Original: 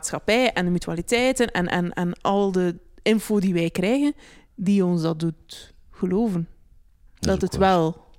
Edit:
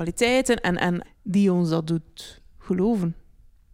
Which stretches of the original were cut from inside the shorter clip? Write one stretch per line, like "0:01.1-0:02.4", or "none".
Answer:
0:02.0-0:04.4

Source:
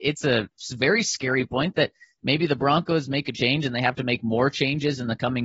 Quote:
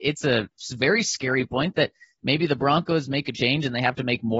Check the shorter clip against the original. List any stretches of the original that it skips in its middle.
none

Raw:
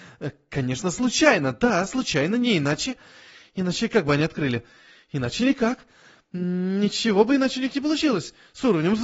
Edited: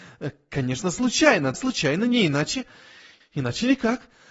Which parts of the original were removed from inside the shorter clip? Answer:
0:01.5-0:01.8
0:03.5-0:05.0

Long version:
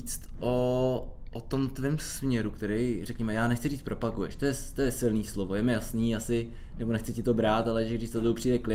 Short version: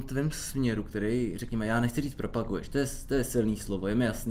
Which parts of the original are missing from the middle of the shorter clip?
none

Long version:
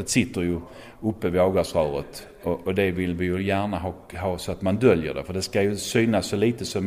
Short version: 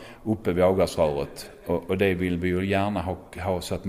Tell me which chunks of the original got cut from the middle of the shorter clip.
none

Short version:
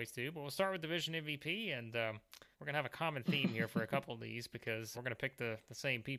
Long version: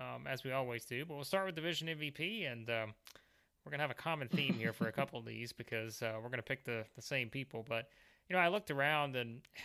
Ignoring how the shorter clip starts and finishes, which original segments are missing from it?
0:03.3-0:03.6
0:06.0-0:06.2

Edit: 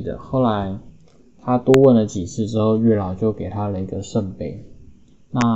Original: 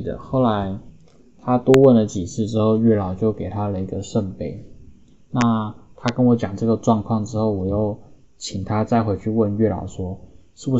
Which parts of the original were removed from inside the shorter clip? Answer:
none

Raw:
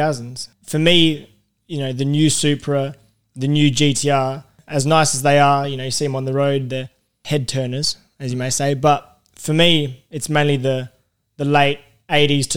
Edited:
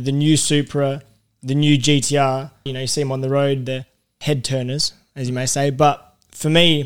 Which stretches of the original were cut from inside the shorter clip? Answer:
0:04.6-0:05.7

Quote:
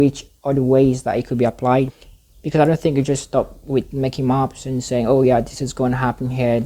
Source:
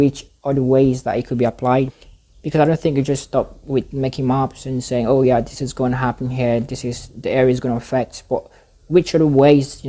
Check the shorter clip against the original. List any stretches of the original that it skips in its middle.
none

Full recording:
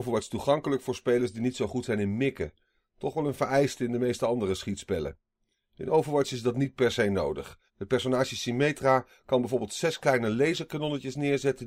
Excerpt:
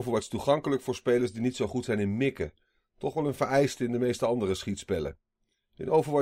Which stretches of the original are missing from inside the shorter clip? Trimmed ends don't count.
none

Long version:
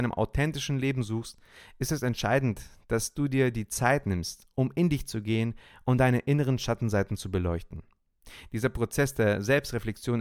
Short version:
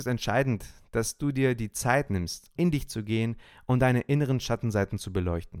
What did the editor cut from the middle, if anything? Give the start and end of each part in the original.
0:04.5-0:04.7

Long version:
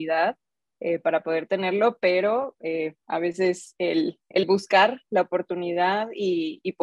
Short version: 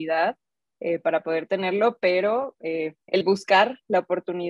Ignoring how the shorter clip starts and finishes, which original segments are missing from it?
0:03.0-0:04.2

